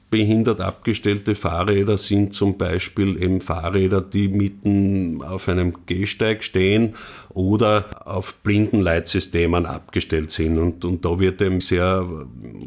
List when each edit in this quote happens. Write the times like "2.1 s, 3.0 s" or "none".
11.6 s